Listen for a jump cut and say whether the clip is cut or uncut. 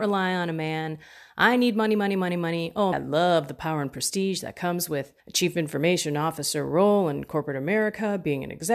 cut